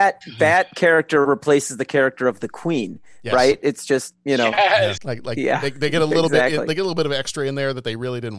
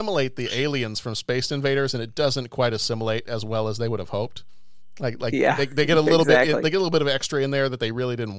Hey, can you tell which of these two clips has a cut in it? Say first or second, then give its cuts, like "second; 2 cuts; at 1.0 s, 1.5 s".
first; 1 cut; at 5.0 s